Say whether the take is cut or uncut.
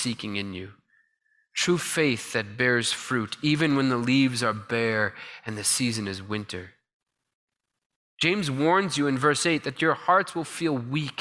uncut